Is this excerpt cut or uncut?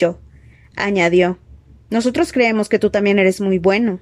uncut